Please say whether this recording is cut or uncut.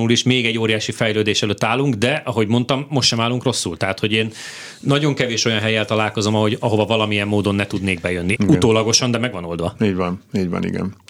cut